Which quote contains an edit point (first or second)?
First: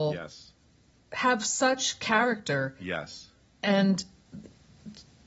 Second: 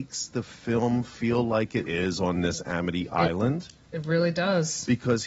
second